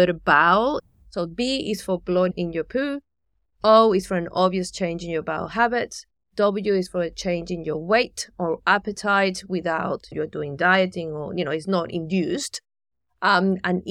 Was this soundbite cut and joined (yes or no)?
no